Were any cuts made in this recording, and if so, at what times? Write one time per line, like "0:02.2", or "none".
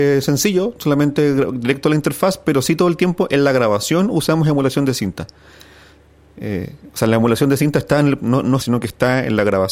0:08.6